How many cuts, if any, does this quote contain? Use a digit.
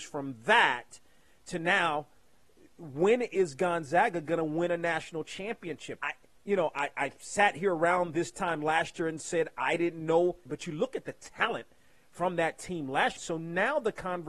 3